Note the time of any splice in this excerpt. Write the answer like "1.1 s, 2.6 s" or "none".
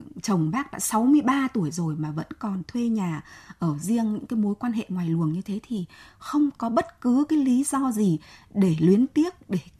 none